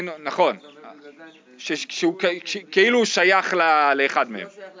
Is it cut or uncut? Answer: cut